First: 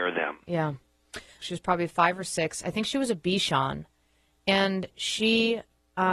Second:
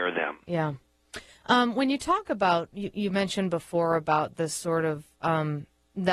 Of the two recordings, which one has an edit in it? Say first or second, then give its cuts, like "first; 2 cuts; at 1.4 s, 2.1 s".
first; 1 cut; at 1.4 s